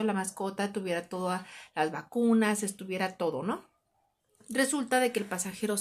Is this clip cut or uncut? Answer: uncut